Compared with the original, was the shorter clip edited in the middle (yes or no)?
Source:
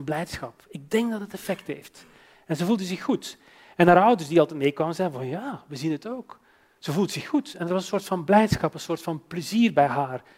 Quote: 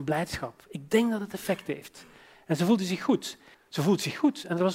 yes